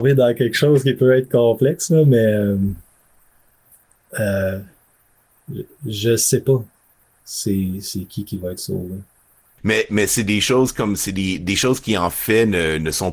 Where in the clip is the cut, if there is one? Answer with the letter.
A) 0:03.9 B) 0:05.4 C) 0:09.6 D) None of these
C